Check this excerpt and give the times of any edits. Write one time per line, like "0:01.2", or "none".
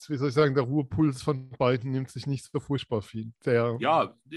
0:03.3